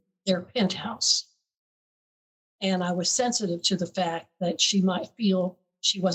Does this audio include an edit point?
yes; 1 cut; at 2.4 s

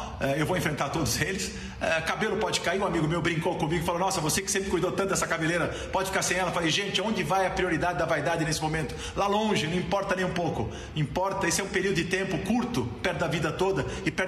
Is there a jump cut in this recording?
no; 0 cuts

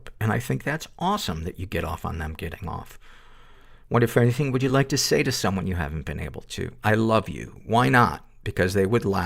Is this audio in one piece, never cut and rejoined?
yes; 0 cuts

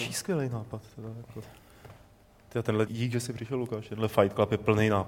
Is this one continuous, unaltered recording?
no; 1 cut; at 2.9 s

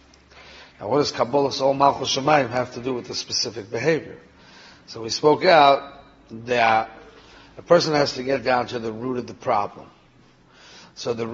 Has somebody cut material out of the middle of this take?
no; 0 cuts

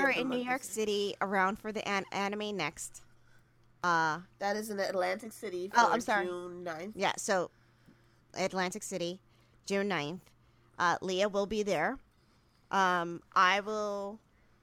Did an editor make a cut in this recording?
no; 0 cuts

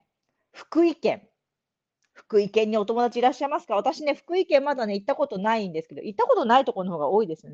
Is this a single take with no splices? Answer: yes; 0 cuts

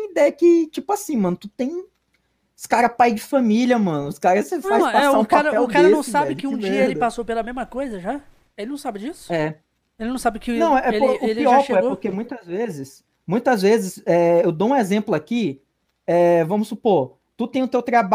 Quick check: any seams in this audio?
no; 0 cuts

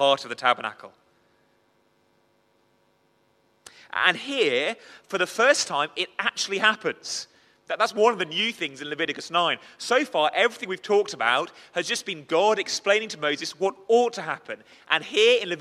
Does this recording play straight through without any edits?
yes; 0 cuts

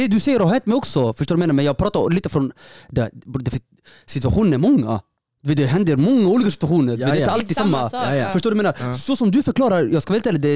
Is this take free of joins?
yes; 0 cuts

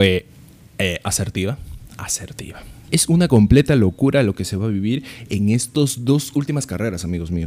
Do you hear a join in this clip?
yes; 1 cut; at 2.9 s

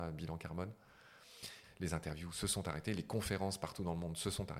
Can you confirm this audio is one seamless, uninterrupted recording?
no; 1 cut; at 1.6 s

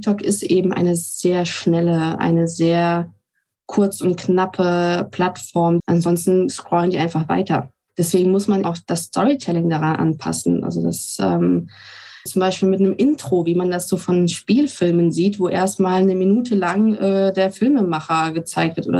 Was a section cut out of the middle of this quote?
yes; 3 cuts; at 5.8 s, 8.6 s, 12.3 s

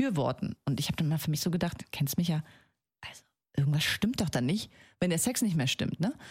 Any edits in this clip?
no; 0 cuts

